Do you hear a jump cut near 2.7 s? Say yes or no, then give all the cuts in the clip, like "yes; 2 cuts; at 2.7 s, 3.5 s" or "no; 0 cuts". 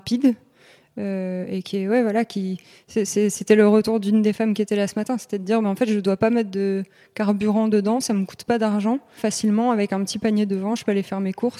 no; 1 cut; at 9.2 s